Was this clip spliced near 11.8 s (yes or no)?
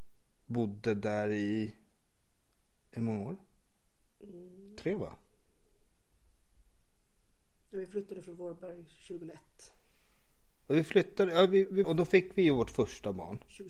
yes